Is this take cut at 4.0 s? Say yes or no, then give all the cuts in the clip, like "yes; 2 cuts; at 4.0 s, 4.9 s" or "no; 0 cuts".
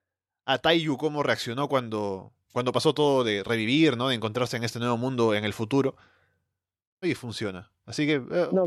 no; 1 cut; at 7.0 s